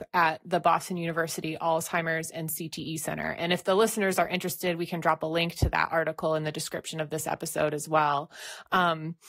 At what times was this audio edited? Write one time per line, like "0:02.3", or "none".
none

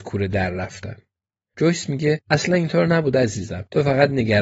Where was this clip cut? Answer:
none

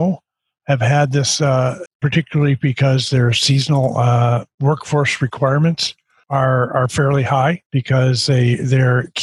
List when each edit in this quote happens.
0:01.9
0:07.7

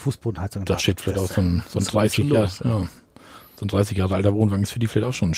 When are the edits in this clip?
none

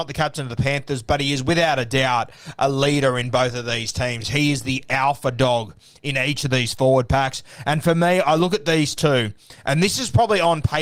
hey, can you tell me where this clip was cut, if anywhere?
none

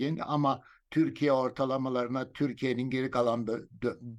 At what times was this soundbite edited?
none

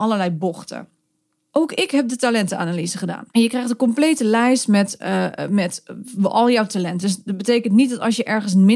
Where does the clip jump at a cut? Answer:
0:01.5
0:03.3
0:07.0

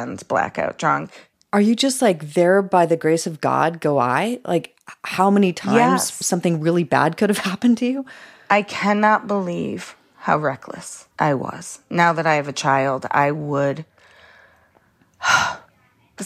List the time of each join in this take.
0:11.1

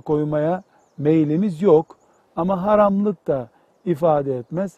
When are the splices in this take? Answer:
0:02.2

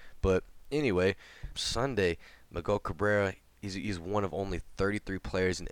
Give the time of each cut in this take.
0:01.5

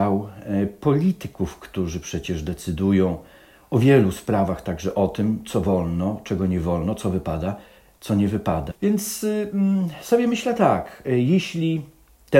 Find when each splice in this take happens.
0:08.7

